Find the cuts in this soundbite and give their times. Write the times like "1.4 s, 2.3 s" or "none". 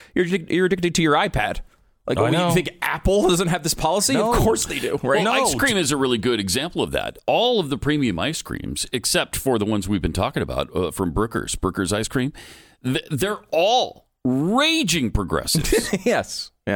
none